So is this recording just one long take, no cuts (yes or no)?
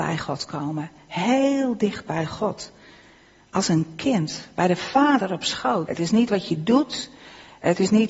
no